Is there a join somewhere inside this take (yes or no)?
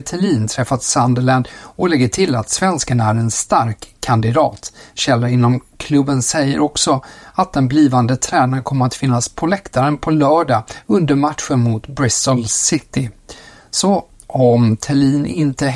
no